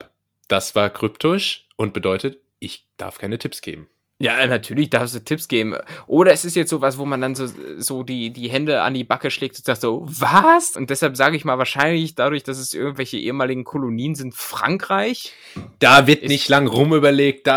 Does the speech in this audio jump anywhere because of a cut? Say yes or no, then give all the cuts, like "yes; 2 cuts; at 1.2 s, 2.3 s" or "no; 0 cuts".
yes; 1 cut; at 10.7 s